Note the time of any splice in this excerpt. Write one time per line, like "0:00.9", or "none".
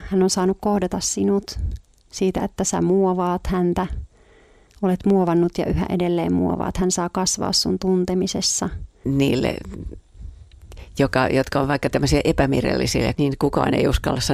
0:09.0
0:13.1